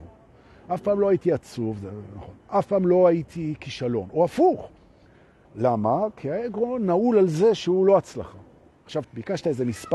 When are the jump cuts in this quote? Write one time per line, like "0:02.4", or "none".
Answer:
0:05.4
0:09.0